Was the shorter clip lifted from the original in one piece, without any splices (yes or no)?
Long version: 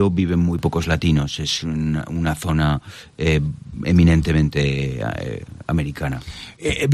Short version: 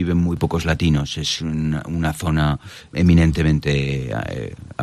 no